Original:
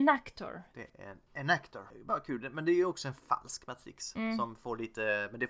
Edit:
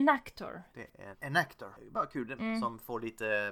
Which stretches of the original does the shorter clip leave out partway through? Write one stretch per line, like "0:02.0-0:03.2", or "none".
0:01.1-0:01.3
0:02.5-0:04.1